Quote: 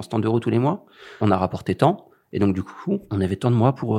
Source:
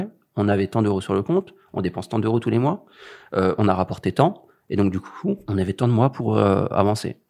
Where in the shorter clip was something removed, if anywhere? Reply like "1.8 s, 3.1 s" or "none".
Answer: 1.2 s